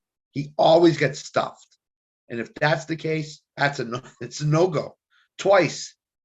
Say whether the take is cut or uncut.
cut